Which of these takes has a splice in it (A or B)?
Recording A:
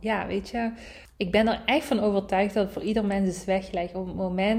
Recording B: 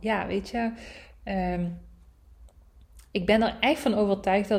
A